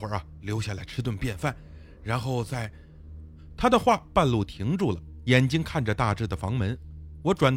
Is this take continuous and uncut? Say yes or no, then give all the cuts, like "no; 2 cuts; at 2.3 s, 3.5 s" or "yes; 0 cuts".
yes; 0 cuts